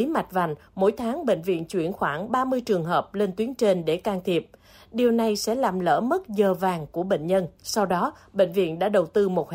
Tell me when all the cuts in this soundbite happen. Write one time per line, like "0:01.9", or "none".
0:07.6